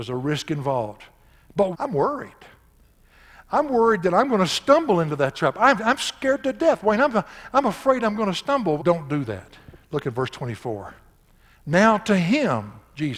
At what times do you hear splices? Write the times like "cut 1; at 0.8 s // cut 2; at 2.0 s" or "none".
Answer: cut 1; at 1.7 s // cut 2; at 8.8 s